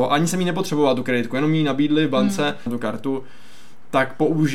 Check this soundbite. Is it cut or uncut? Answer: cut